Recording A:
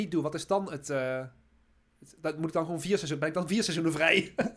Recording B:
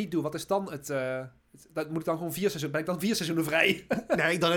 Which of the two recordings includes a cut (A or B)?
B